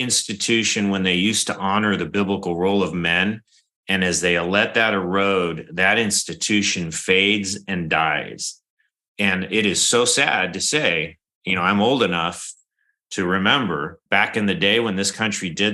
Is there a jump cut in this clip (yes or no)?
yes